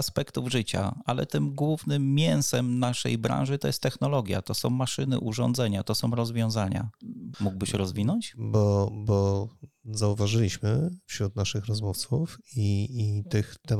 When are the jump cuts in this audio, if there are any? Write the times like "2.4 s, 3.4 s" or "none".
7.3 s